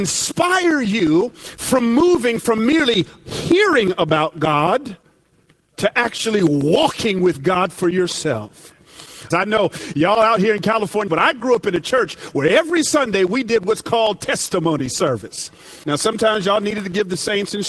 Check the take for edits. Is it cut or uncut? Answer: cut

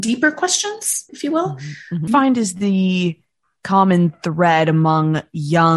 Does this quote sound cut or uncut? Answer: cut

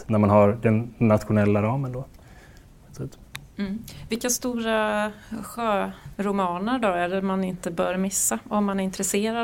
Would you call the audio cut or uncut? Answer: uncut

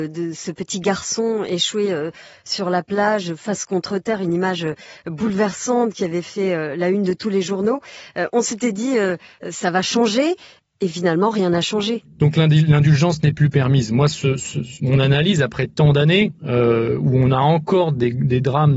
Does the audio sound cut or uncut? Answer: cut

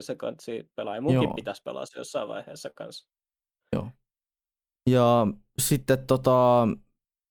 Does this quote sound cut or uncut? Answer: cut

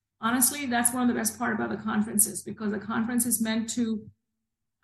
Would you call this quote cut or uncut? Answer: uncut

